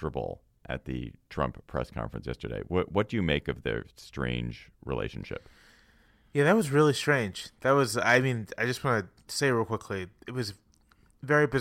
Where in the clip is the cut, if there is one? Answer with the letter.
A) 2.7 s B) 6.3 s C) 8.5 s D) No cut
D